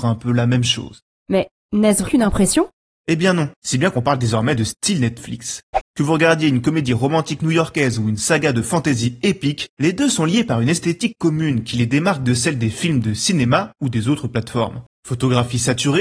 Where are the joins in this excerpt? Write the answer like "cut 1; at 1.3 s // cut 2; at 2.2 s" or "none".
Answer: cut 1; at 2.0 s // cut 2; at 3.5 s